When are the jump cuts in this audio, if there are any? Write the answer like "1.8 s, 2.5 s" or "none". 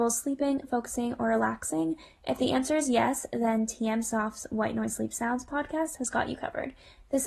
none